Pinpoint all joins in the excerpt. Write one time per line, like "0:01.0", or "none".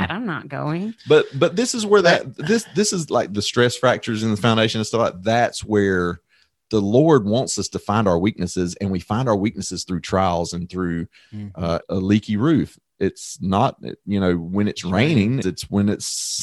0:11.8
0:15.4